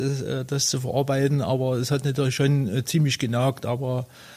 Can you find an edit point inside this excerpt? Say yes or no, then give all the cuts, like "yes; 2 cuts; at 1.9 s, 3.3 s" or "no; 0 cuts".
no; 0 cuts